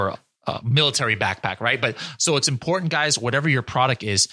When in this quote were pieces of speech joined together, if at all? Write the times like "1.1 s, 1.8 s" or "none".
none